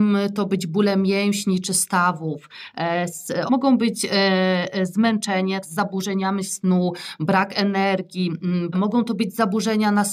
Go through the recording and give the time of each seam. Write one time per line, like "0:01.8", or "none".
0:03.5
0:05.6
0:08.7